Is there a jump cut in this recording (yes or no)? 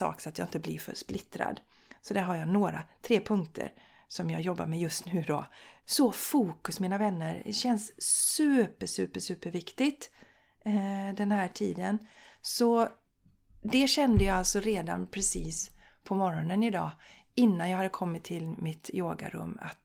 yes